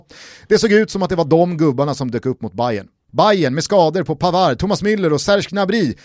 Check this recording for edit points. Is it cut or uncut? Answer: cut